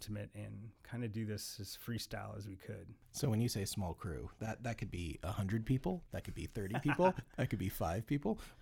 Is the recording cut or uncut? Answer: uncut